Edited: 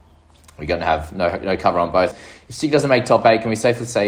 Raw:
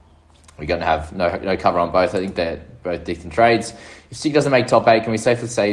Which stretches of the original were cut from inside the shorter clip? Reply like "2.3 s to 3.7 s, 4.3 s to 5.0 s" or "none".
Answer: 2.1 s to 3.7 s